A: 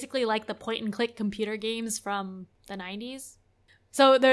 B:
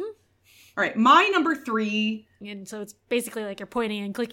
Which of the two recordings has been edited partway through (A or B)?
B